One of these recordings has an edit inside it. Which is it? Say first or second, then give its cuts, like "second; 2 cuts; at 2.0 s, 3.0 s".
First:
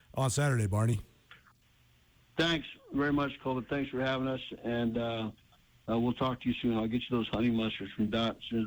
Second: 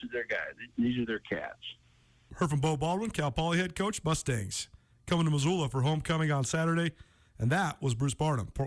second; 1 cut; at 2.3 s